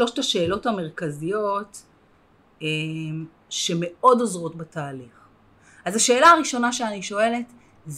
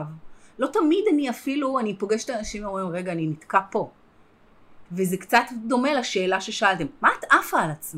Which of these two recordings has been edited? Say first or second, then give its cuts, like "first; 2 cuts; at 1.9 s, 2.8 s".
second; 1 cut; at 4.9 s